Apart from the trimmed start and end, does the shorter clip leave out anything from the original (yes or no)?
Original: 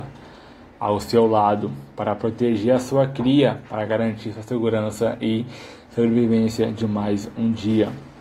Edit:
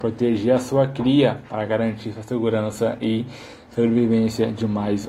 no